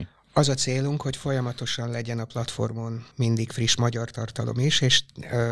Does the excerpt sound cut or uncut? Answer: cut